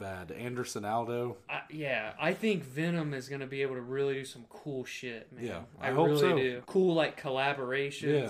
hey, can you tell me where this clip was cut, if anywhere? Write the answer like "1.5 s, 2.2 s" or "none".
6.6 s